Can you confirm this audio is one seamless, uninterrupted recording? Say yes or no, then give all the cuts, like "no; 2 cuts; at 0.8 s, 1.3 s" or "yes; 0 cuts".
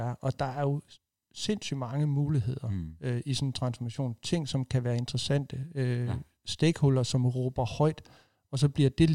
yes; 0 cuts